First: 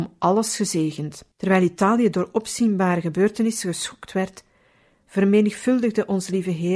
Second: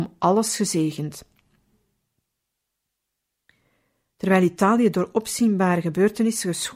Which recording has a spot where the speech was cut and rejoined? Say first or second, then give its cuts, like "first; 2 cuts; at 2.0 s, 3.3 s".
first; 1 cut; at 1.3 s